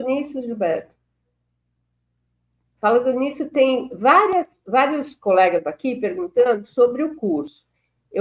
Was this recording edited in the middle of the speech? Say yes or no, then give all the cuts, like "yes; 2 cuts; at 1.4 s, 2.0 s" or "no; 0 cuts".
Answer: no; 0 cuts